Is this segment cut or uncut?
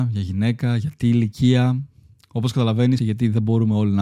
cut